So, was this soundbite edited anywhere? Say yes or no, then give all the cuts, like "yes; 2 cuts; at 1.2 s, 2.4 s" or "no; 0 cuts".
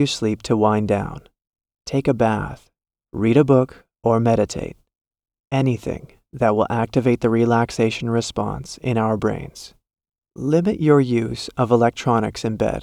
no; 0 cuts